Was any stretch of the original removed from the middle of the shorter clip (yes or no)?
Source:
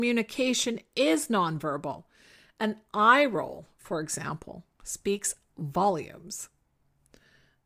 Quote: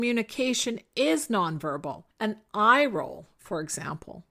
yes